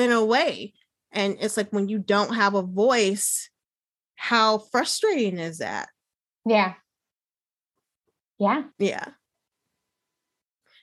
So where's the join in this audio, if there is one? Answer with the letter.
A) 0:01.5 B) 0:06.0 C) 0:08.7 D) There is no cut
C